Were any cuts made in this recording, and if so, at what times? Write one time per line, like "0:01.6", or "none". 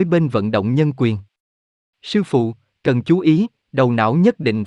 none